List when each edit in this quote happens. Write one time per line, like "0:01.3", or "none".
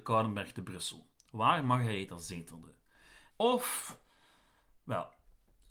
0:03.3